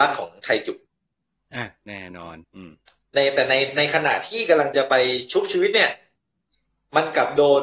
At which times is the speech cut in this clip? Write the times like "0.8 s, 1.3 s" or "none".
2.4 s